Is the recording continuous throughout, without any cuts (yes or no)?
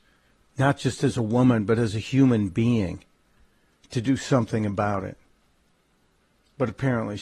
yes